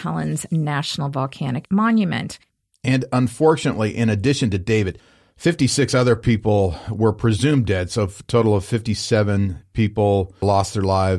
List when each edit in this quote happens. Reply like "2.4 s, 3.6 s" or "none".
none

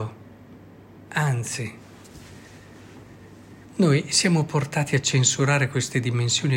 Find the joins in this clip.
3.6 s

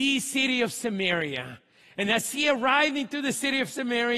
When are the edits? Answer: none

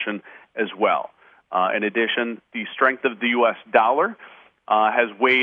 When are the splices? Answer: none

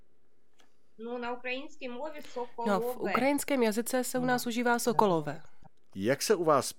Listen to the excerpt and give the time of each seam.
5.9 s

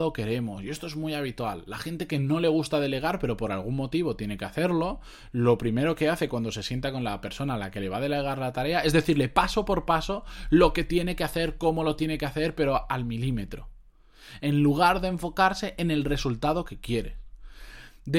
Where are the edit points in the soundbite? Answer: none

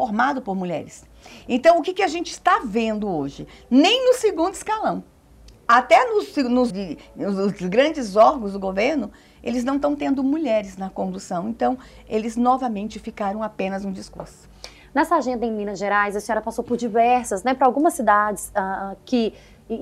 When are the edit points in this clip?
6.7 s

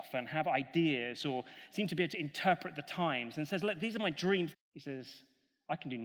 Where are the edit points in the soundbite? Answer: 4.5 s

